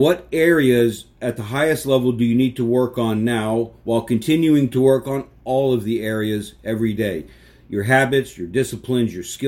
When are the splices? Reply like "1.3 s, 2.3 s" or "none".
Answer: none